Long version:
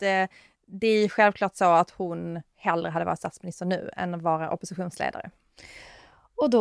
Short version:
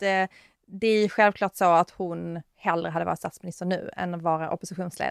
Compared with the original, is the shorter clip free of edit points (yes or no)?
yes